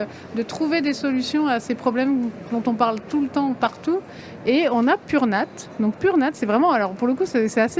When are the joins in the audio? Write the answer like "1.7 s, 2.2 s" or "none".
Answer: 4.4 s